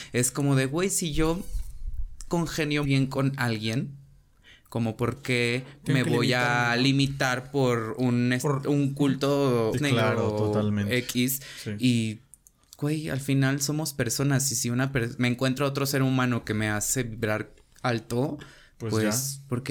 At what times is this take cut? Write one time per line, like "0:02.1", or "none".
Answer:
0:02.8
0:09.7